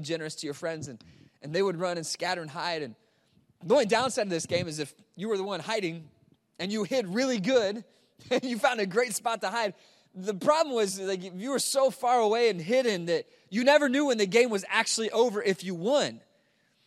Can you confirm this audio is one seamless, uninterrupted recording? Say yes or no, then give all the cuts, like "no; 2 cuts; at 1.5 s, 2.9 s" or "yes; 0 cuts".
yes; 0 cuts